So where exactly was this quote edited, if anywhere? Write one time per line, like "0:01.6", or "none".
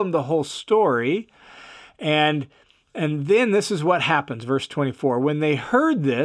none